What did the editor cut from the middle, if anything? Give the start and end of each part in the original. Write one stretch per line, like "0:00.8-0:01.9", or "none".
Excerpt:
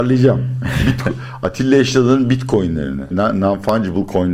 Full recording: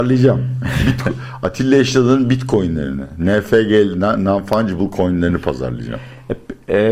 0:03.1-0:03.9